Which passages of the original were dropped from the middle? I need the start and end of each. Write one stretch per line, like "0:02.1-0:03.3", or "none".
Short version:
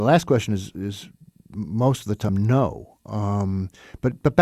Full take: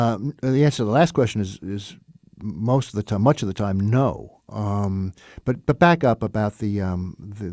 0:03.2-0:03.7